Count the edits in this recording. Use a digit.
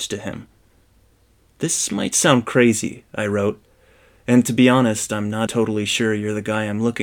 1